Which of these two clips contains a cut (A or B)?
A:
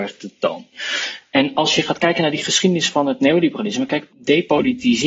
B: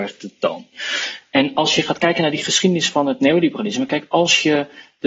A